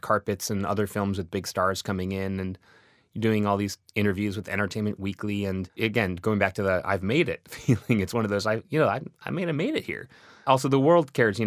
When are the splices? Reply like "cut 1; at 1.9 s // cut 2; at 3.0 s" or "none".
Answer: none